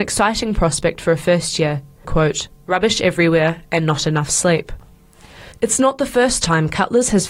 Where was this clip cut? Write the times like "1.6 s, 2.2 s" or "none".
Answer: 2.0 s